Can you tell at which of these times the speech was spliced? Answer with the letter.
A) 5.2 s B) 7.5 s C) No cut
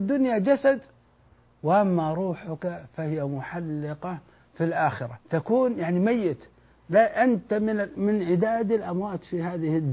A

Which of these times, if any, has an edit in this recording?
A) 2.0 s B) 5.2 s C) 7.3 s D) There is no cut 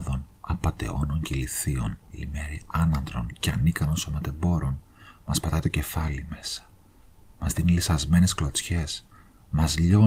A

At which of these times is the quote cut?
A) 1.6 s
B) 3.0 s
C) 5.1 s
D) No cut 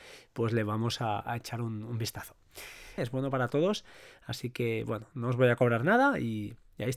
B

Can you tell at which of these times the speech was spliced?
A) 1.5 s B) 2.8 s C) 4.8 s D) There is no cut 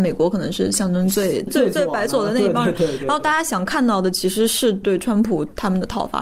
A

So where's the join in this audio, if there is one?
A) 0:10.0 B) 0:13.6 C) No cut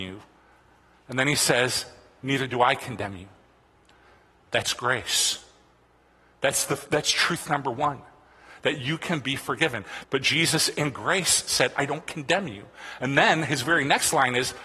A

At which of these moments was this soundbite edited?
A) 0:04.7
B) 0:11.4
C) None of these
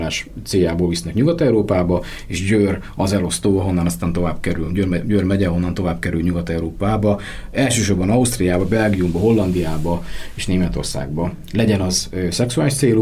C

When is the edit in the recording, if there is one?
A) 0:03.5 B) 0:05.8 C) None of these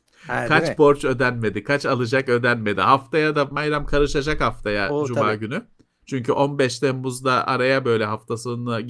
A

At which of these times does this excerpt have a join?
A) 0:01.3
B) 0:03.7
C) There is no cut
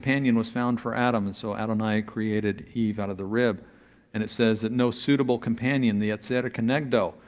C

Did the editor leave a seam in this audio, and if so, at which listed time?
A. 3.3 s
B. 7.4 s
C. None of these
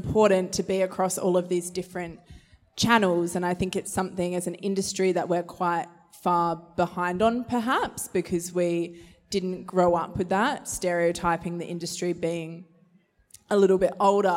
C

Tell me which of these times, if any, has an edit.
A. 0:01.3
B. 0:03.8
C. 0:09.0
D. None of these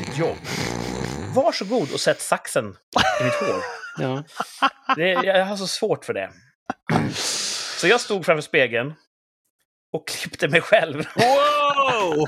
D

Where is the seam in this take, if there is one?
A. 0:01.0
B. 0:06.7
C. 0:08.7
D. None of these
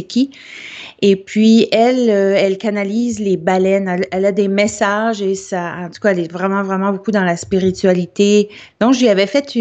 C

